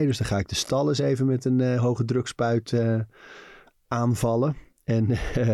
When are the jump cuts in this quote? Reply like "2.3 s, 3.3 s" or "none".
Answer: none